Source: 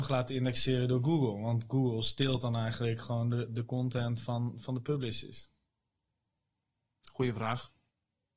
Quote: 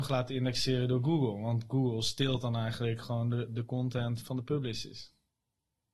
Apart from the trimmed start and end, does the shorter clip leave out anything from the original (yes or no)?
yes